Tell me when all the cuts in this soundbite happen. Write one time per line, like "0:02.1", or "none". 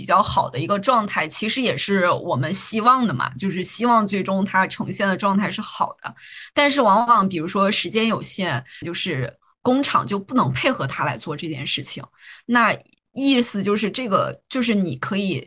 0:08.8